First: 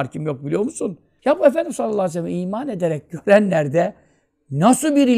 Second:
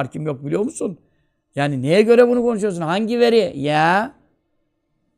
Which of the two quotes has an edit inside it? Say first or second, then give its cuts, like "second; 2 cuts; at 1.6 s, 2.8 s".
first; 1 cut; at 1.2 s